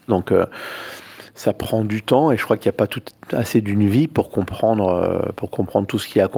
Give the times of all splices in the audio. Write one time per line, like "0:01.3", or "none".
none